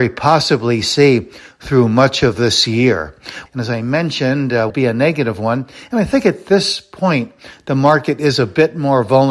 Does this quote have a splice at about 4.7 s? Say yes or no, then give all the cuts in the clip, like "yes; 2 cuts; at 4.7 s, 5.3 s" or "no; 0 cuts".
yes; 2 cuts; at 3.5 s, 4.7 s